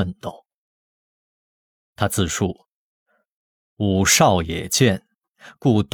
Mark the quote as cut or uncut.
uncut